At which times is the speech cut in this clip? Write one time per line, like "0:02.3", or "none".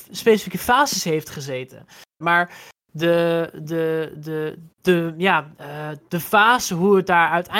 0:02.2
0:04.7